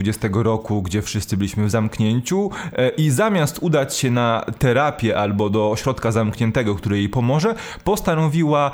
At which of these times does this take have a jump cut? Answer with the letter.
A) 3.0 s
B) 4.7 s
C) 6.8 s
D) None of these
D